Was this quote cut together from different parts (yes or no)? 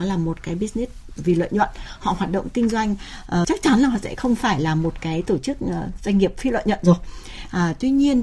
yes